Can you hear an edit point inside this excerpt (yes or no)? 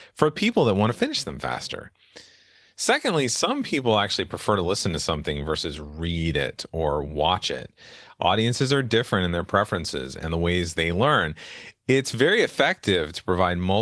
no